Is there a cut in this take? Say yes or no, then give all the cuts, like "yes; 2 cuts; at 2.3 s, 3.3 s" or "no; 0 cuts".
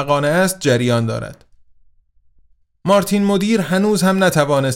no; 0 cuts